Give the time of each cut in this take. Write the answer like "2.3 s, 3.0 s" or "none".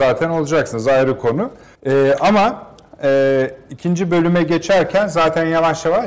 1.8 s